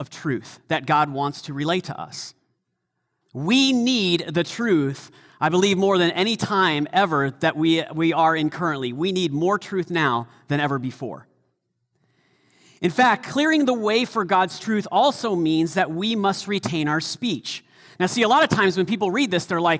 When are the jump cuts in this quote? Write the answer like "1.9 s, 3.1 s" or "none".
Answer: 3.2 s